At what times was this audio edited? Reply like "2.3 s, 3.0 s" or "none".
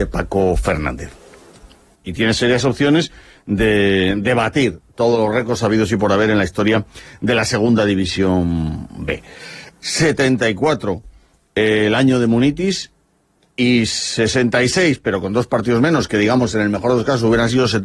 1.9 s, 9.7 s